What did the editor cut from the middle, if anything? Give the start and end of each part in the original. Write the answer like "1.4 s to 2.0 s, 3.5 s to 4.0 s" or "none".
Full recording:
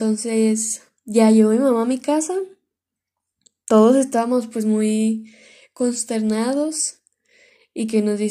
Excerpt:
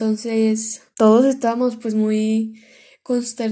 0.9 s to 3.6 s